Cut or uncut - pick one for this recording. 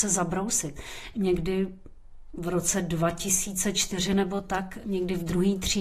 cut